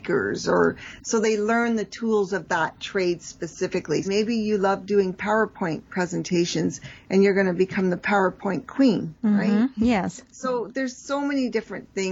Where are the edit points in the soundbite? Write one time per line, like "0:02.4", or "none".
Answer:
0:04.0